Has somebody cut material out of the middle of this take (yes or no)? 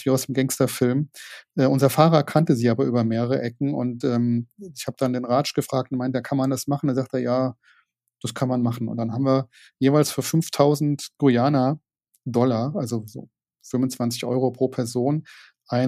no